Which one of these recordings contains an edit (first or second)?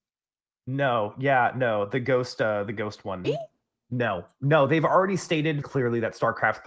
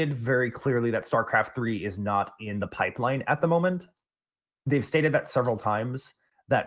first